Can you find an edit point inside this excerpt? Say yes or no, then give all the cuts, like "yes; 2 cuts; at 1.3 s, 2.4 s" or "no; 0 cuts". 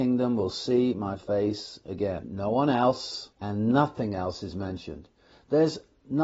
yes; 2 cuts; at 2.2 s, 3.3 s